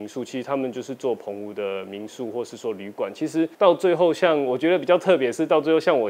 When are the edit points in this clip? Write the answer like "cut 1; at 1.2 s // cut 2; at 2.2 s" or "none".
cut 1; at 3.5 s